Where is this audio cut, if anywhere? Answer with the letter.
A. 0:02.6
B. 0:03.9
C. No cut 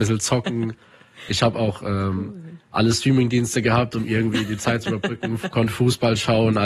C